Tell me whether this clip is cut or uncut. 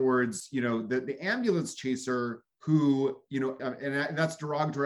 cut